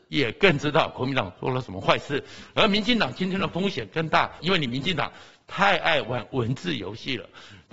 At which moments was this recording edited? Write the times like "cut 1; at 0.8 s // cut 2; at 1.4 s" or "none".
cut 1; at 4.4 s